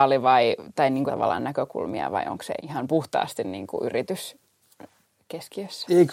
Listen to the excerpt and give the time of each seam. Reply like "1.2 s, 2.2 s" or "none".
1.1 s, 2.6 s